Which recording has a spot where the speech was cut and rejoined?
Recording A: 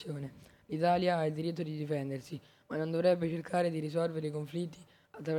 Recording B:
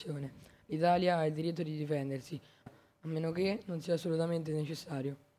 B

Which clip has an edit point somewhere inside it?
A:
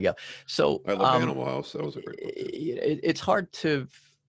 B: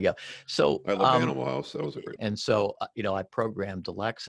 B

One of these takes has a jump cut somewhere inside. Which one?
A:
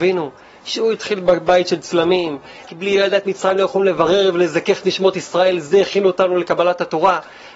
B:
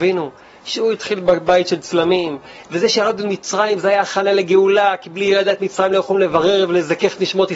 A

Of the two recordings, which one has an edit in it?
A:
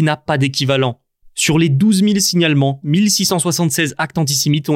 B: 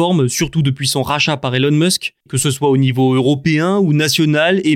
B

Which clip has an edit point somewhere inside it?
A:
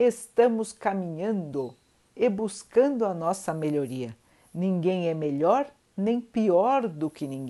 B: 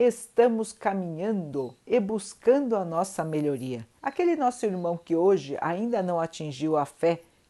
B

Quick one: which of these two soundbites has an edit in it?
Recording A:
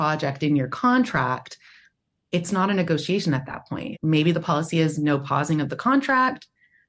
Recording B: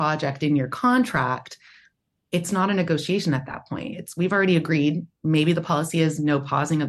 A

